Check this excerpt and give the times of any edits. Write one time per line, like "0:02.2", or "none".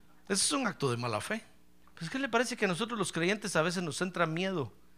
0:01.8